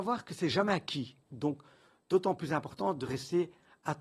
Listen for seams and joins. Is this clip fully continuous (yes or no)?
no